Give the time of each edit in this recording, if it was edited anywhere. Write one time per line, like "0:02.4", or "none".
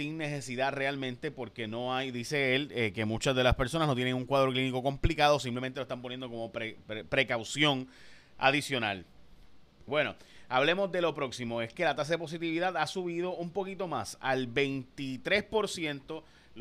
0:09.9